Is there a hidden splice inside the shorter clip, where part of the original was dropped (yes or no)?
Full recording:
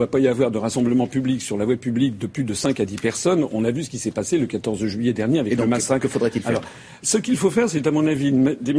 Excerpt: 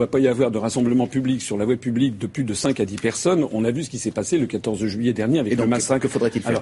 no